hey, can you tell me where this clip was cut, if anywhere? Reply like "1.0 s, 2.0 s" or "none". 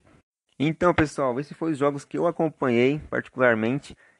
none